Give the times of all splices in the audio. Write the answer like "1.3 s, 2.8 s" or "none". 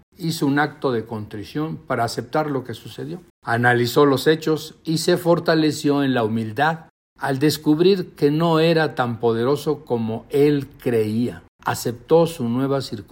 3.3 s